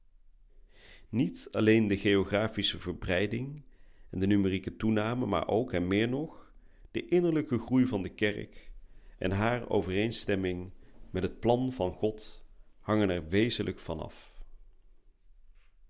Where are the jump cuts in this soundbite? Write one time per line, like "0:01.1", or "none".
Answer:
none